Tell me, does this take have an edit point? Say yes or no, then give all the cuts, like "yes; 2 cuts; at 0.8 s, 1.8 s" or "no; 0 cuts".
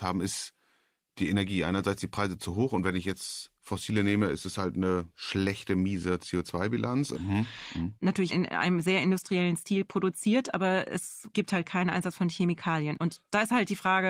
yes; 2 cuts; at 3.6 s, 7.1 s